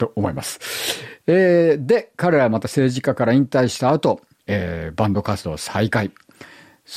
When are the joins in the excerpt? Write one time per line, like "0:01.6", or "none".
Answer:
0:04.4